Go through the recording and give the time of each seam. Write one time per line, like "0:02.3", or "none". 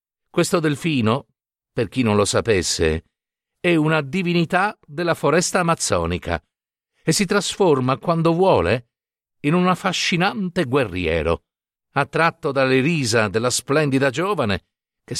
0:11.8